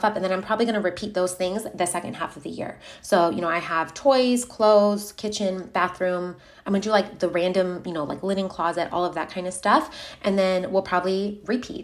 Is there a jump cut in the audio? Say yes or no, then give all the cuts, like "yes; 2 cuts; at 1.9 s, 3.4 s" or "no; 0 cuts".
no; 0 cuts